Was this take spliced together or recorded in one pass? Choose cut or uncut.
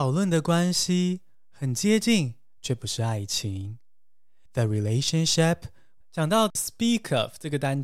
cut